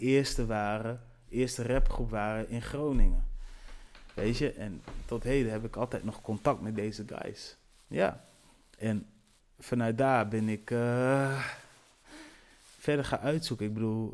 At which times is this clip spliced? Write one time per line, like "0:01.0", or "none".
none